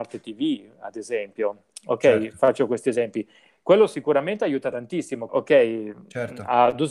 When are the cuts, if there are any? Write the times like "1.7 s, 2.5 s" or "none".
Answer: 5.3 s

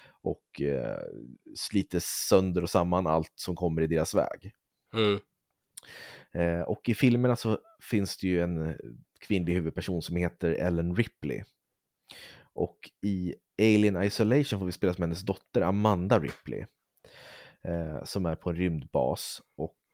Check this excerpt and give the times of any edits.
none

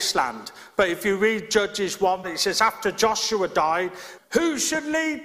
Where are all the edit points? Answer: 2.2 s, 4.2 s

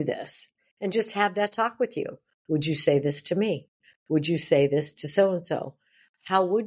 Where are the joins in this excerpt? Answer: none

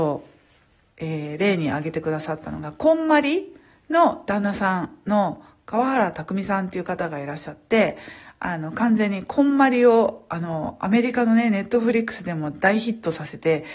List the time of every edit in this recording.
none

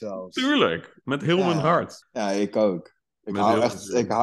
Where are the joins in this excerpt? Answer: 2.0 s

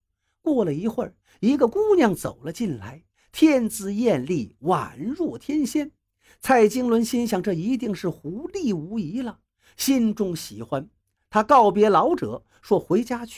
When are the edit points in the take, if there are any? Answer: none

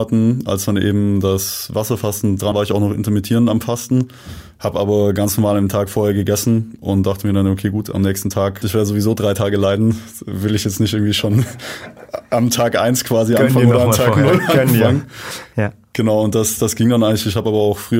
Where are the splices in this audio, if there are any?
2.5 s, 8.6 s

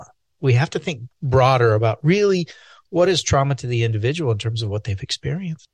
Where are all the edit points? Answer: none

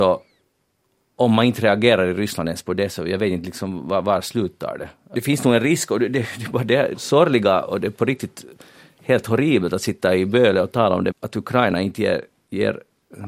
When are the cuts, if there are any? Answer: 5.1 s, 6.9 s, 11.1 s

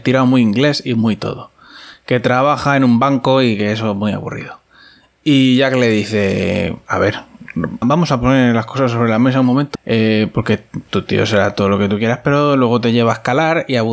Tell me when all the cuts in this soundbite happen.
7.8 s, 9.7 s

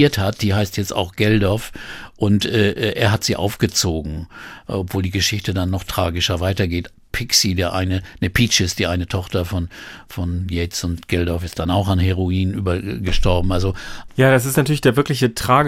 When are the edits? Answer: none

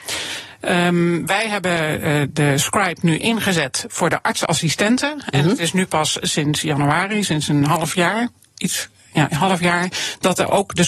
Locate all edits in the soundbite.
none

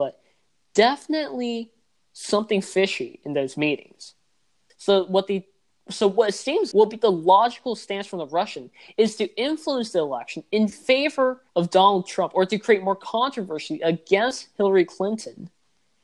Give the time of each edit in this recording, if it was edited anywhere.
4.7 s, 6.7 s, 11.5 s

